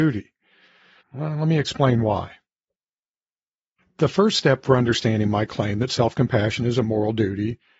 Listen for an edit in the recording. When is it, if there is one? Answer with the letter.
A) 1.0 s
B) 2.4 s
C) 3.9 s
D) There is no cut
A